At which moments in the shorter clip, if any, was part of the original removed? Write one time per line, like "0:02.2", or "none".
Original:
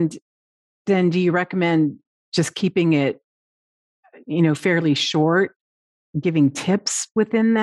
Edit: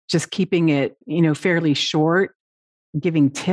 0:01.0